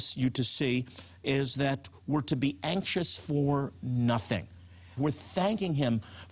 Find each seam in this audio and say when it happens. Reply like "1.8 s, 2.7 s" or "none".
5.0 s